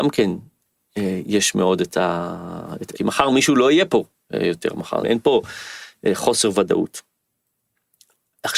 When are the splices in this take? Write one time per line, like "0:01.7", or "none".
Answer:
0:02.9
0:05.0